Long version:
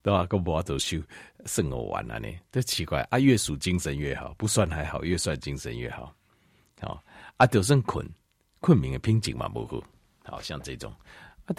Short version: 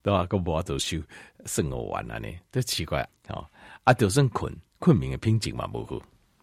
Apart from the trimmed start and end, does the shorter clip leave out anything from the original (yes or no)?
yes